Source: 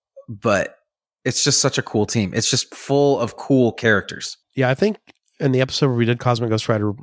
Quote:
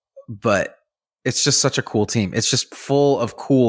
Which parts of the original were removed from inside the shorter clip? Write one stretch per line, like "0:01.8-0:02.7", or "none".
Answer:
none